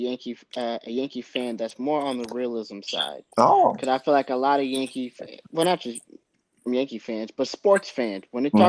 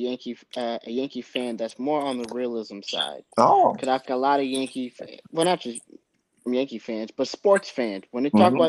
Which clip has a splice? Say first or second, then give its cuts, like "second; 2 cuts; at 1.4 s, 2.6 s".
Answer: second; 1 cut; at 4.0 s